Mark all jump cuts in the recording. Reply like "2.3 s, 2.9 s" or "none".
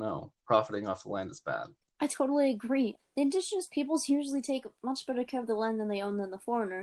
1.8 s, 3.0 s